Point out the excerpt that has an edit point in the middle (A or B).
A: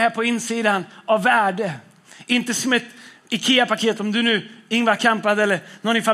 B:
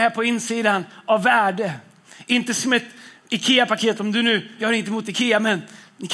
B